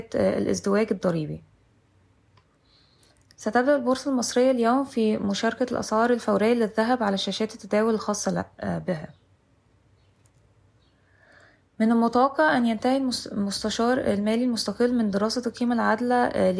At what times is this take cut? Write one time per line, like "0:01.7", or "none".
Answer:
none